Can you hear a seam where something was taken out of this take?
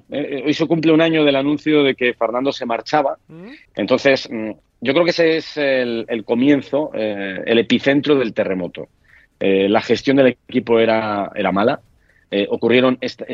yes; 1 cut; at 3.7 s

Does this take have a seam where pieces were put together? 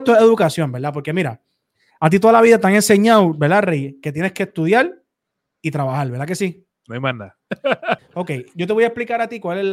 yes; 1 cut; at 8.0 s

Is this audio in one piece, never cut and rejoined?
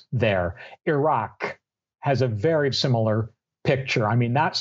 no; 1 cut; at 2.7 s

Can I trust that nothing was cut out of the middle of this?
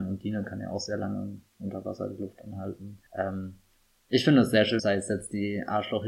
no; 2 cuts; at 3.1 s, 4.8 s

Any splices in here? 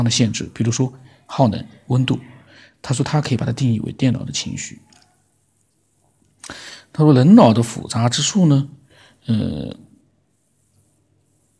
no; 0 cuts

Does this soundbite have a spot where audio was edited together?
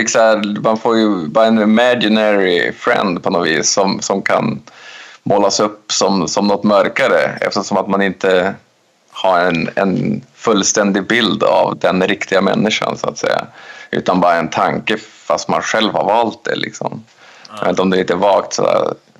no; 0 cuts

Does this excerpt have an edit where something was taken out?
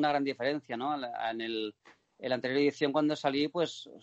no; 0 cuts

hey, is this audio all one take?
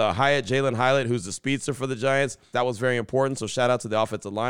no; 1 cut; at 2.5 s

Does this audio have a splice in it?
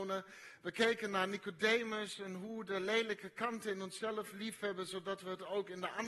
no; 0 cuts

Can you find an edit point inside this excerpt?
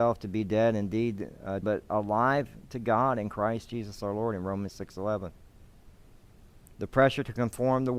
yes; 1 cut; at 1.6 s

